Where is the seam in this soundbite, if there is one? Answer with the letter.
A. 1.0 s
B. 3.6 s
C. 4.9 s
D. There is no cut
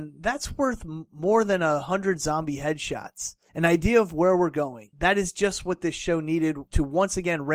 D